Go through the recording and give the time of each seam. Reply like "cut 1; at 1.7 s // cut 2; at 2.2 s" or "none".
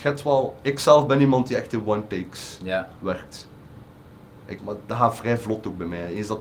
cut 1; at 4.6 s